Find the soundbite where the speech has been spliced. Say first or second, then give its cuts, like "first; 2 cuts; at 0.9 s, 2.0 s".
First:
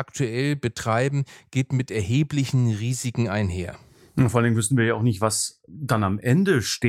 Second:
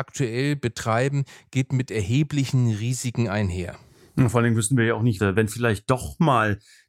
second; 1 cut; at 5.2 s